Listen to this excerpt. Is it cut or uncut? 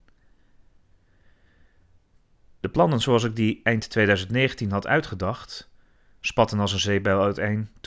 uncut